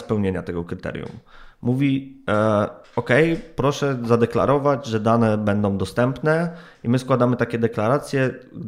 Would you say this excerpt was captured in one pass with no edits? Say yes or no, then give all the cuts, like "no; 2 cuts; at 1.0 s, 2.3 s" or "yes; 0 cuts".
yes; 0 cuts